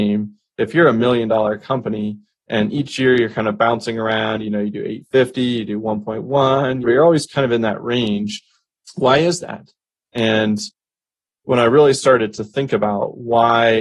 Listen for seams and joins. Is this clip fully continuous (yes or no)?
no